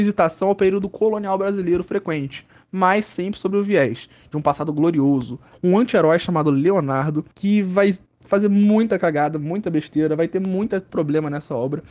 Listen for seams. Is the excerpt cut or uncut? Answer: cut